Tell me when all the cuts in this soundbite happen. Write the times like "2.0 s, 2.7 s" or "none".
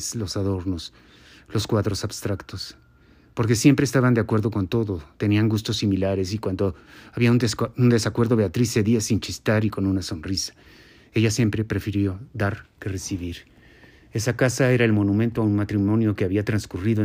none